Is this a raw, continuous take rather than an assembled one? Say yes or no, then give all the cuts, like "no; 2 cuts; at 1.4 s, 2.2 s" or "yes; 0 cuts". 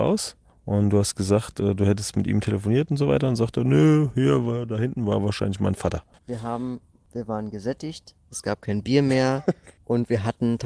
no; 1 cut; at 6.2 s